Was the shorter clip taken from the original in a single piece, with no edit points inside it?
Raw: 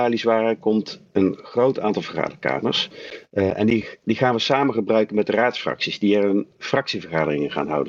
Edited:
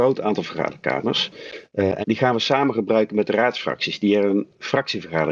no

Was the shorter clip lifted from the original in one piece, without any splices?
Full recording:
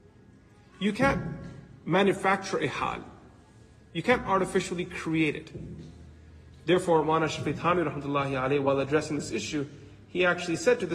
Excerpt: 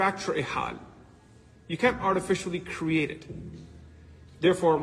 yes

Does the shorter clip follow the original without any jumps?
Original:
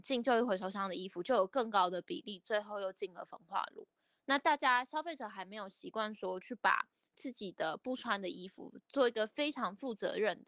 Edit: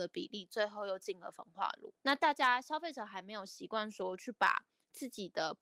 no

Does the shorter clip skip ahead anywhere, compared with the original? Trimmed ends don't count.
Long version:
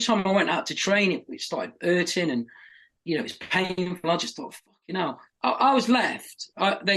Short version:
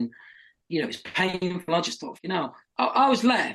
yes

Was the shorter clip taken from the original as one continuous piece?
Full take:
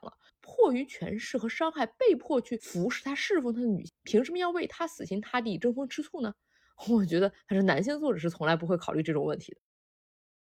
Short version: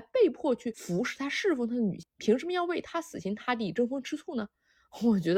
yes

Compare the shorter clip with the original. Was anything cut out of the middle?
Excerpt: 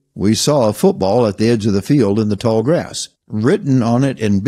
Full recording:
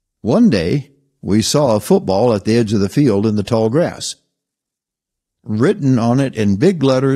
yes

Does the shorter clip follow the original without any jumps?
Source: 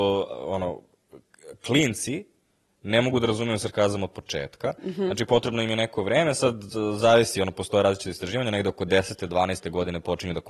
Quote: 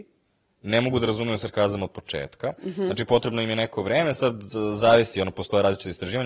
yes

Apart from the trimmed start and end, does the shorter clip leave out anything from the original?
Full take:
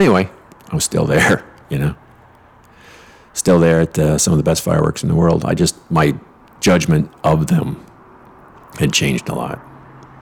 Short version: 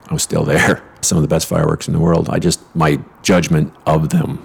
yes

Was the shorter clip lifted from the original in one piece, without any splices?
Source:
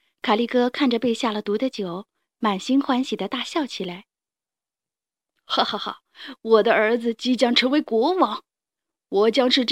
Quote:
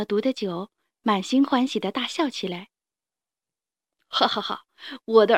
yes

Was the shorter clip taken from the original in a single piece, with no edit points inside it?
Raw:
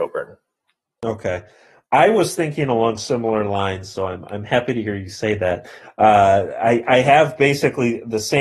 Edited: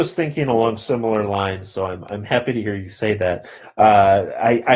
yes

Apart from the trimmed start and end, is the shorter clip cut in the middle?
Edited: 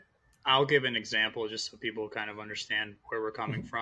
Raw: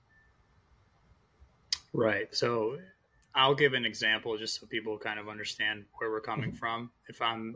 no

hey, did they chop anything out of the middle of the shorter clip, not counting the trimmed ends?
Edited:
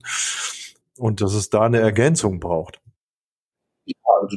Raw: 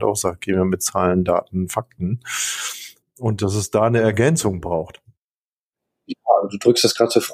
no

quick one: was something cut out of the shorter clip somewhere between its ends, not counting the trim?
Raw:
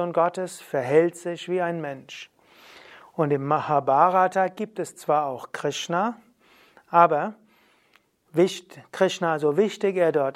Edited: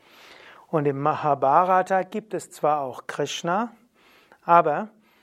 no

